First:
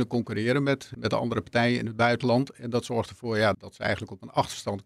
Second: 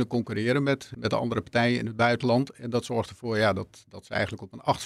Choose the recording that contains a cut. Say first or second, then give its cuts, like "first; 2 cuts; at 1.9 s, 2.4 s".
first; 1 cut; at 3.5 s